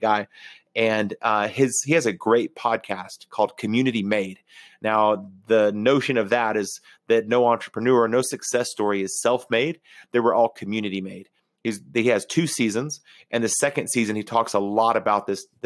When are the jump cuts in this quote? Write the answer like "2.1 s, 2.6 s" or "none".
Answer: none